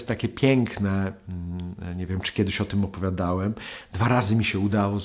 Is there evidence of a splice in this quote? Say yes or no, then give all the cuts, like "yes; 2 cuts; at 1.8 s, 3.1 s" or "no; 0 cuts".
no; 0 cuts